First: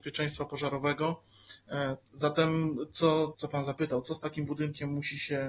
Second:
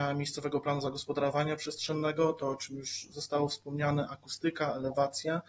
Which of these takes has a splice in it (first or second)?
first